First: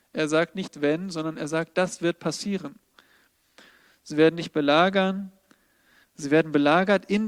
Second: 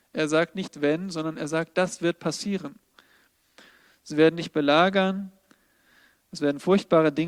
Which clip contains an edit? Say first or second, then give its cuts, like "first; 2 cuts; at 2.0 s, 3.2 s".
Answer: first; 1 cut; at 6.0 s